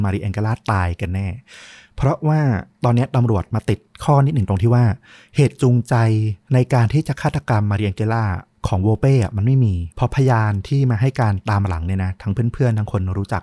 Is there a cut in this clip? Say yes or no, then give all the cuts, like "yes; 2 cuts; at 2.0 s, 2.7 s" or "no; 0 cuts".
yes; 2 cuts; at 2.7 s, 9.9 s